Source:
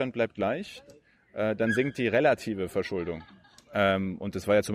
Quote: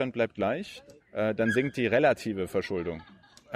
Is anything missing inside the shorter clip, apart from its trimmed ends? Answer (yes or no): yes